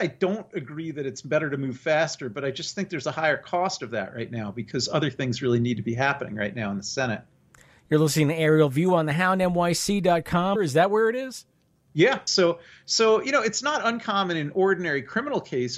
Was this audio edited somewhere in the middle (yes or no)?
yes